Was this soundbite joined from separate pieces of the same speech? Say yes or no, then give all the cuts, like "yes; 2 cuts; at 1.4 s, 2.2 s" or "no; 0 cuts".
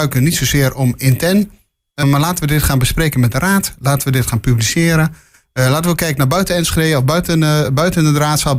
yes; 1 cut; at 2.0 s